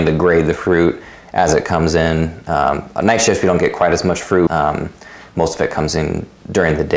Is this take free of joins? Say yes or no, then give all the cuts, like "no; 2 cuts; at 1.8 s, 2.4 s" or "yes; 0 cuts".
no; 1 cut; at 4.5 s